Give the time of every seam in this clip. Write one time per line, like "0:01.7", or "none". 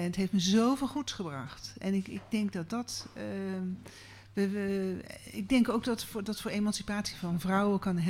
none